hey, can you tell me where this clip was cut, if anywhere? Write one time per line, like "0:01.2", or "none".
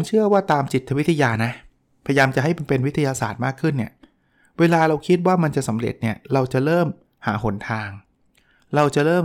none